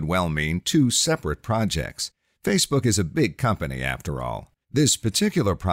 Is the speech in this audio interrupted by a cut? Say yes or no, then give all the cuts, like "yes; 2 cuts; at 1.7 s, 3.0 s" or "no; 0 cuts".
yes; 1 cut; at 4.6 s